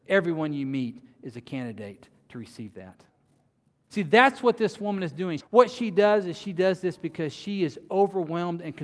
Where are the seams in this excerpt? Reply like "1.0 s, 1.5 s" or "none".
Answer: 3.9 s, 5.4 s